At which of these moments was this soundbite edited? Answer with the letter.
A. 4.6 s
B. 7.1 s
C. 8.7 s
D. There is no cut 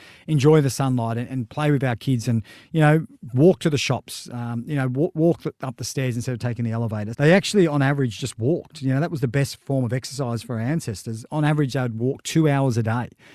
B